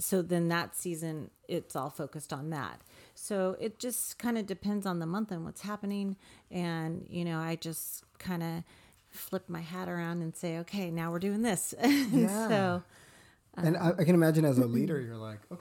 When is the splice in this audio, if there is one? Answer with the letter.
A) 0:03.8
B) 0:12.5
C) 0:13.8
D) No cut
D